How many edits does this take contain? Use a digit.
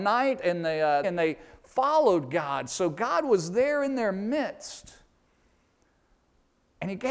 1